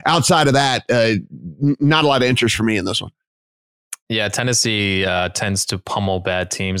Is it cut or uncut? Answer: uncut